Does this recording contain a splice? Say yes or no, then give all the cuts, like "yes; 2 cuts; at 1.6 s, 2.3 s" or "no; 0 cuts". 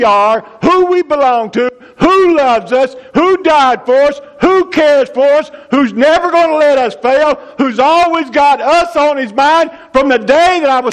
no; 0 cuts